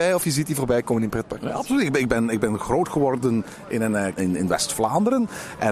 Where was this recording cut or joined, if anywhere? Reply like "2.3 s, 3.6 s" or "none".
4.2 s